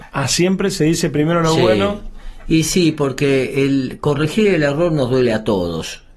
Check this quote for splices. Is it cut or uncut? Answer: uncut